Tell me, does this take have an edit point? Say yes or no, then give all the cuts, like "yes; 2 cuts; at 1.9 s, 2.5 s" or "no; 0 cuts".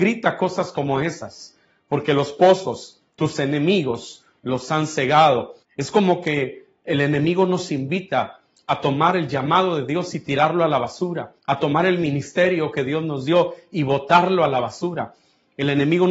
yes; 2 cuts; at 5.6 s, 11.4 s